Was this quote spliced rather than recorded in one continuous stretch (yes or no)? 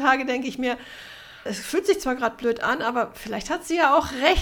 yes